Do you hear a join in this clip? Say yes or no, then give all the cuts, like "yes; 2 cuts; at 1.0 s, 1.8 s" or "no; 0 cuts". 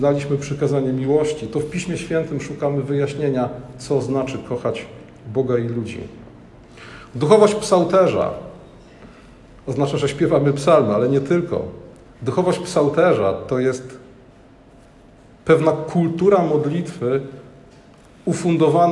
no; 0 cuts